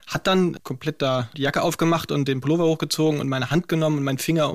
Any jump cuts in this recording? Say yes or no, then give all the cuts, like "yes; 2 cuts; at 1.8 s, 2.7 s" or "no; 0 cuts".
no; 0 cuts